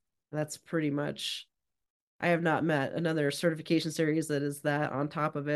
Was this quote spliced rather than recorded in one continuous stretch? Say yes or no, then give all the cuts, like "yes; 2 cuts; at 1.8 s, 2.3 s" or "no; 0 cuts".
no; 0 cuts